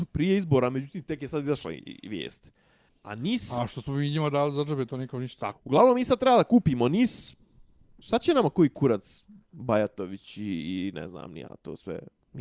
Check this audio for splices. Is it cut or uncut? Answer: cut